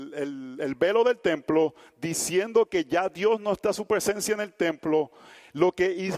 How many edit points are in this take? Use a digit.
0